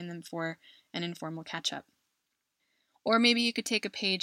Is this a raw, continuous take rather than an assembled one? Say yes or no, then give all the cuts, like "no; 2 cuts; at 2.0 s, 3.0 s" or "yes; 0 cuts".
yes; 0 cuts